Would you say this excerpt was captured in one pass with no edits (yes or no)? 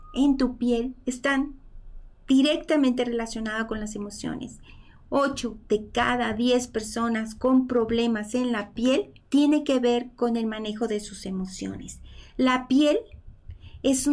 no